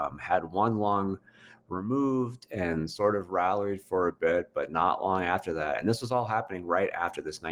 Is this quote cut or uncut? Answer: uncut